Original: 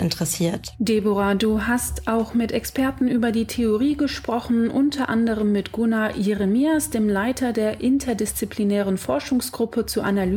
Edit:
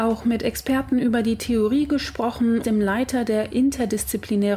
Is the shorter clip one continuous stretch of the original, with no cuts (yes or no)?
no